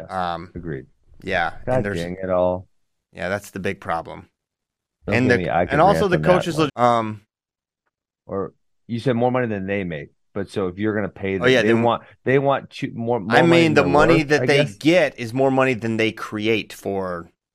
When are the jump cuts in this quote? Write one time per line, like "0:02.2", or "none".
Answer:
0:06.7